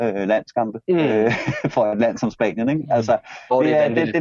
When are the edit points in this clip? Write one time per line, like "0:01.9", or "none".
none